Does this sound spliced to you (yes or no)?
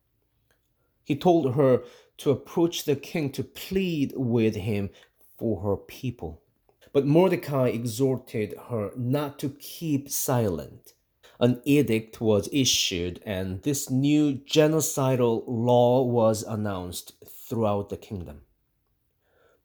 yes